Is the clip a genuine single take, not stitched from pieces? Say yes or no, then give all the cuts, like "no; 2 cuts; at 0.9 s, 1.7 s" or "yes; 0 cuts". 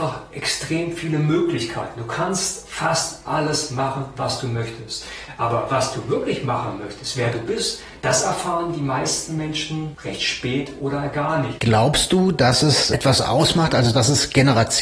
no; 1 cut; at 11.6 s